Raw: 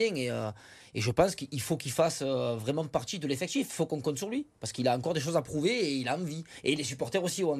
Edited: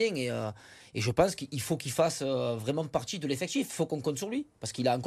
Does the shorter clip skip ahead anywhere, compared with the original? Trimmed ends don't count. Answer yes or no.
no